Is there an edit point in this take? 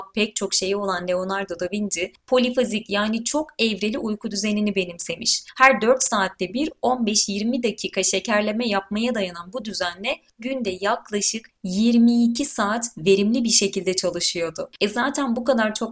no; 0 cuts

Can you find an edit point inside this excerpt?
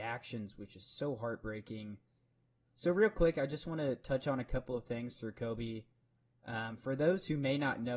yes; 1 cut; at 2.7 s

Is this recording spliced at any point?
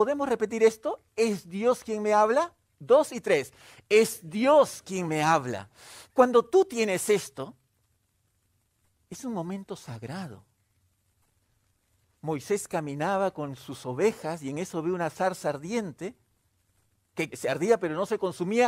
yes; 1 cut; at 17.3 s

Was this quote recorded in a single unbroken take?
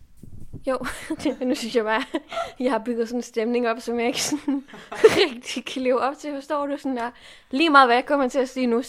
yes; 0 cuts

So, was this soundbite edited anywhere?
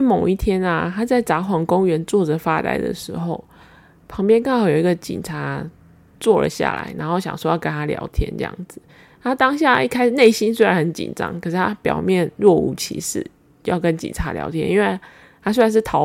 no; 0 cuts

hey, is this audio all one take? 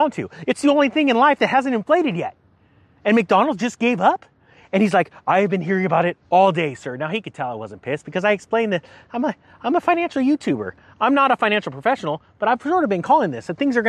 yes; 0 cuts

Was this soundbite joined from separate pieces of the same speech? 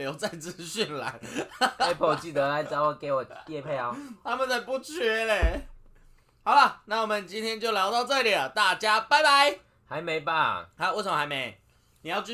no; 0 cuts

